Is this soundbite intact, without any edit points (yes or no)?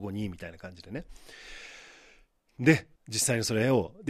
no